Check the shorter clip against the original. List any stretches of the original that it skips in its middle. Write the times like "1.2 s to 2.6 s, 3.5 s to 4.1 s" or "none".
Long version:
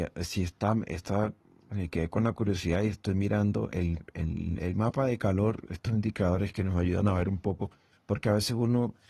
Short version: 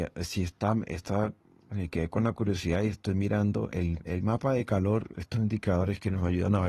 4.1 s to 4.6 s